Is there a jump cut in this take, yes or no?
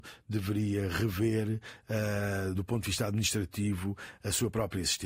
yes